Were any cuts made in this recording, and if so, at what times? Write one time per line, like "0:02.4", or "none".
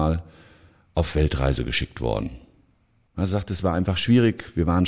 0:03.1